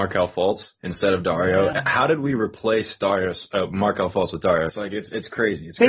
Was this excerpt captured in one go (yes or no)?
no